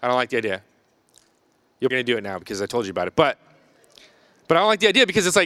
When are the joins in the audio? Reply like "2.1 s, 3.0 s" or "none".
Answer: 1.9 s